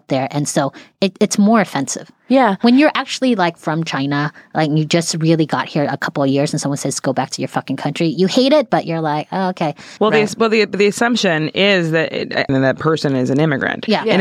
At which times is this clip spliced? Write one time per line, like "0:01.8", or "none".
0:10.0
0:12.5